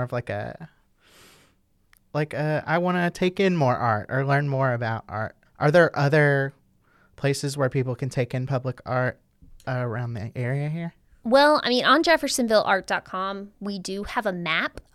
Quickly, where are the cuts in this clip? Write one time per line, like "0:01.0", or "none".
0:05.4